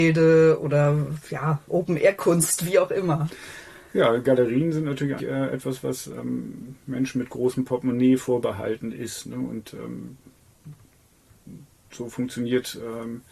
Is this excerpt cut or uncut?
cut